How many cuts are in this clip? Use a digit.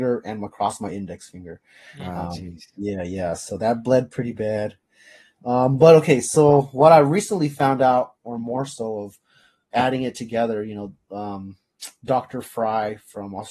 0